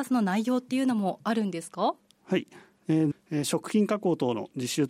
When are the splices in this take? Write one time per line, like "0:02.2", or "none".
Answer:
0:03.1